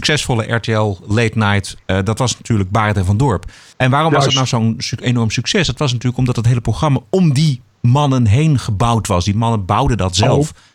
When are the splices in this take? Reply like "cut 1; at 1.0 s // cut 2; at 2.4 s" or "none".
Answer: none